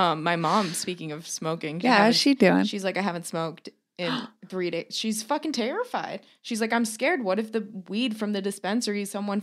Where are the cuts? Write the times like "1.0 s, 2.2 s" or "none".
1.8 s, 4.4 s